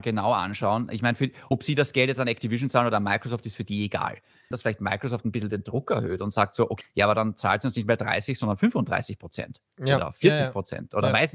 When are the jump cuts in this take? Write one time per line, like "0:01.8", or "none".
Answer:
0:04.5
0:06.8